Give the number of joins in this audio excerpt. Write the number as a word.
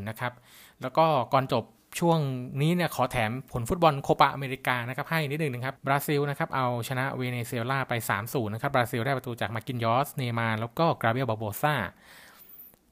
one